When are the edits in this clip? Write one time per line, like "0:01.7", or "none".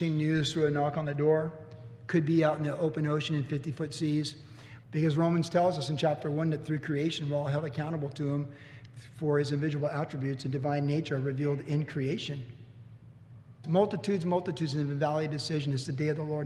0:04.8
0:13.6